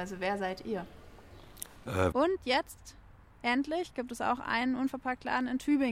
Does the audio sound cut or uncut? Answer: cut